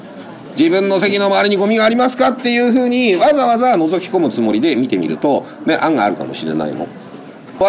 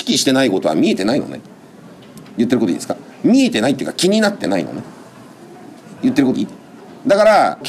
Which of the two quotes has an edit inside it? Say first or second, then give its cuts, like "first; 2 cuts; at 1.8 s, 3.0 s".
second; 1 cut; at 6.3 s